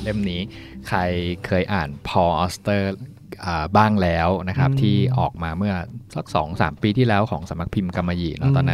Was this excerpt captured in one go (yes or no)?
yes